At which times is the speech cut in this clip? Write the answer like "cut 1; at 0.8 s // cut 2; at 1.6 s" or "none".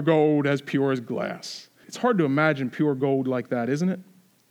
cut 1; at 1.8 s